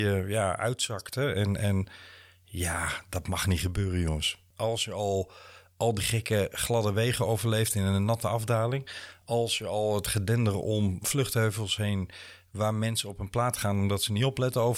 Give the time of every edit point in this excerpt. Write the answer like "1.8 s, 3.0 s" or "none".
none